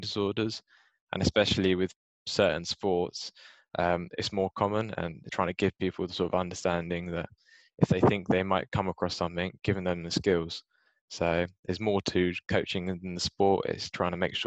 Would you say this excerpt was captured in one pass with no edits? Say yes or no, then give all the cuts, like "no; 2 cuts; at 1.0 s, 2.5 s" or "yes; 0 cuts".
no; 1 cut; at 5.3 s